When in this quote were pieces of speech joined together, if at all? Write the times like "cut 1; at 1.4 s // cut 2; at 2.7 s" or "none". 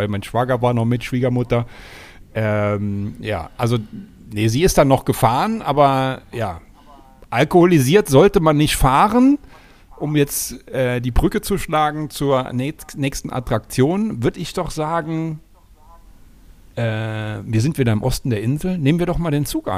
none

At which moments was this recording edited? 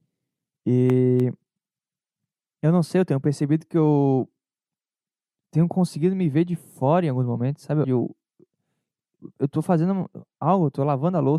cut 1; at 7.8 s

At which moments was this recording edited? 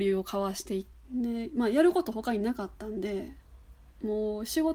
cut 1; at 1.0 s

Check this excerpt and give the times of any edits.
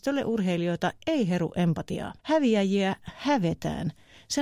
cut 1; at 2.2 s

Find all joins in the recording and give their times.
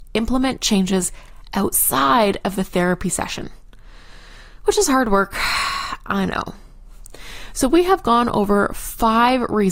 none

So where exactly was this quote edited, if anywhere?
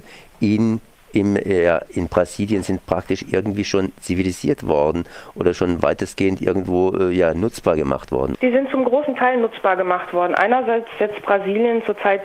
cut 1; at 8.3 s

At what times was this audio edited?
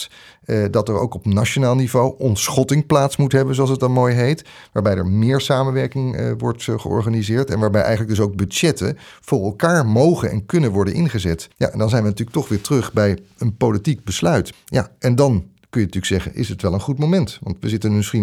cut 1; at 11.5 s // cut 2; at 14.5 s

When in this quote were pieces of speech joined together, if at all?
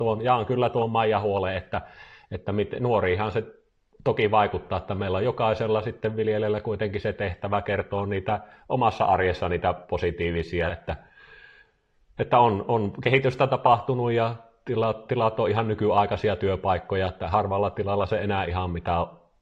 cut 1; at 10.7 s

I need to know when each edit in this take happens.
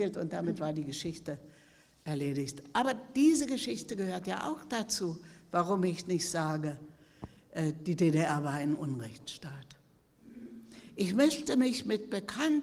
none

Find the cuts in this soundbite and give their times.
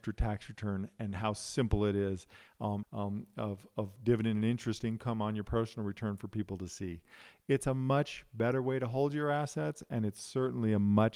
cut 1; at 2.8 s

